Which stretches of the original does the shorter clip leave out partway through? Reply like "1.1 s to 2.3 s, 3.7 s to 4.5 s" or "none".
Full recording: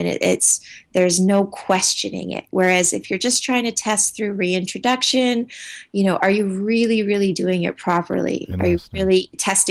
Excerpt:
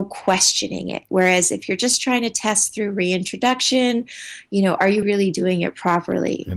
6.4 s to 7.0 s